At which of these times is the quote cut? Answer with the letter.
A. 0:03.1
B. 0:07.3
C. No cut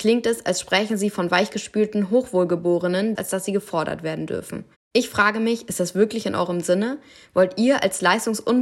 A